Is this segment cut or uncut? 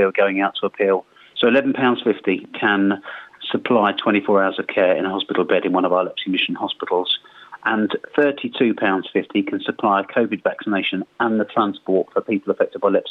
cut